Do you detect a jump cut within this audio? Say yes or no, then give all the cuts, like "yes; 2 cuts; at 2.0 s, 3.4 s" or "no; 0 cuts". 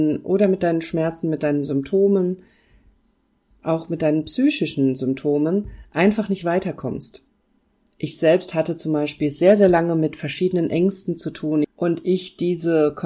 yes; 1 cut; at 11.6 s